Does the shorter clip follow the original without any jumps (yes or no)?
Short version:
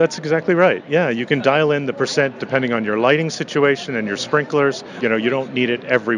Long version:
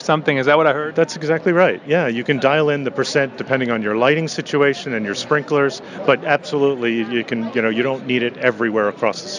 no